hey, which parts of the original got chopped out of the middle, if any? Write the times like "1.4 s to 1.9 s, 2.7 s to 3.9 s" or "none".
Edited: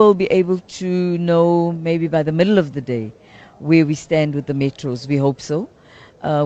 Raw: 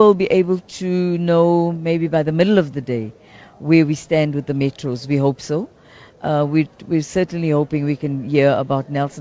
none